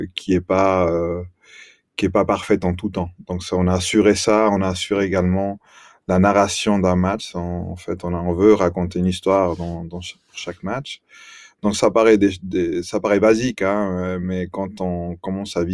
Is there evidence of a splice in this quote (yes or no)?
no